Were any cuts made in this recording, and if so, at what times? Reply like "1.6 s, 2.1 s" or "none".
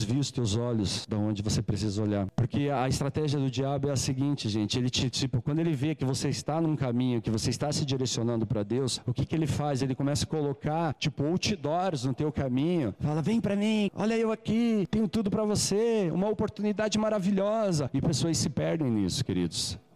none